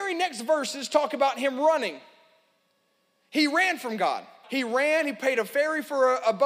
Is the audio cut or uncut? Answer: cut